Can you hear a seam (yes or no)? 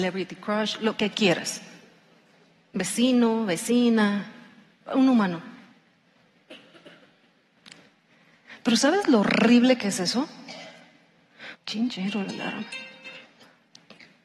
yes